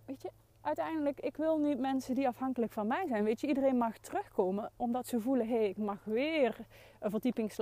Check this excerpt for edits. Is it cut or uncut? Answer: uncut